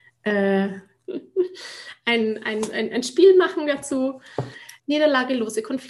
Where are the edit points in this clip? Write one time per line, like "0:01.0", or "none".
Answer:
0:01.1
0:04.8